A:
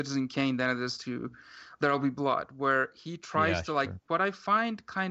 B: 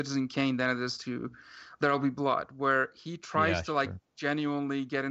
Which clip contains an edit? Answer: A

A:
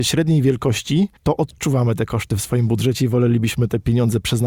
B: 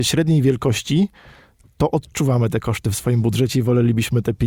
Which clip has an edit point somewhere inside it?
A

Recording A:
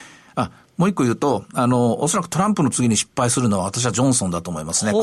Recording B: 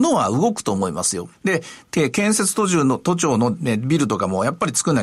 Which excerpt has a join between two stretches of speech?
B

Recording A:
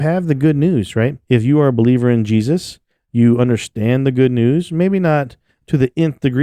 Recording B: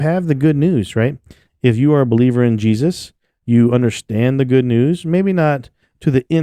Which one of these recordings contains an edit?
A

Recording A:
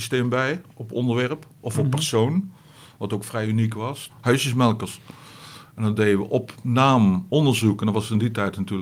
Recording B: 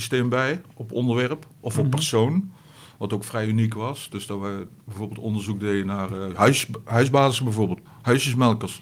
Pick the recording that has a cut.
A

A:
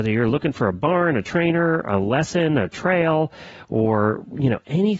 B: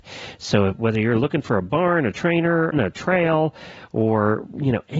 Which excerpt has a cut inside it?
B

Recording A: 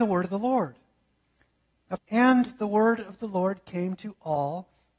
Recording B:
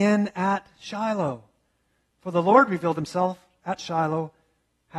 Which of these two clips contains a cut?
A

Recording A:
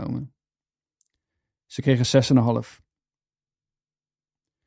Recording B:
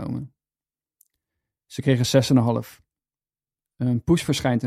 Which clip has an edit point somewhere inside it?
B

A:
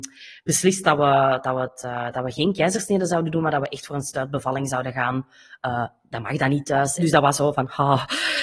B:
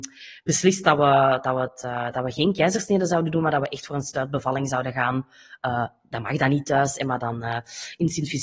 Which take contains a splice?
A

